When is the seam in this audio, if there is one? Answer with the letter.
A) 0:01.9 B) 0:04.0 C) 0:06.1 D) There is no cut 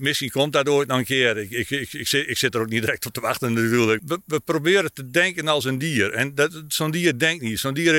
B